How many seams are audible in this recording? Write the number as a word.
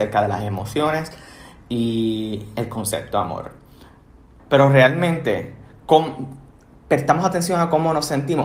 one